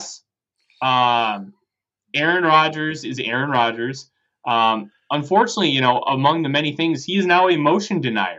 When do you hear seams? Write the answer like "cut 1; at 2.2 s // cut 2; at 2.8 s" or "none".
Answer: none